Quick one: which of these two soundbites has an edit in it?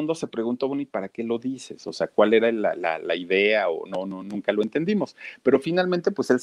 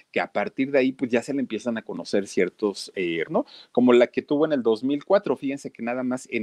second; 1 cut; at 3.3 s

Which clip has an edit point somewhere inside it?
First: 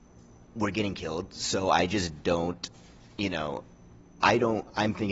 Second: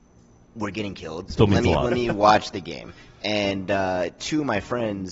second; 1 cut; at 1.3 s

